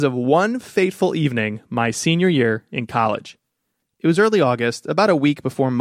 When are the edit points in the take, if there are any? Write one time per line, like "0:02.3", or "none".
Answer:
none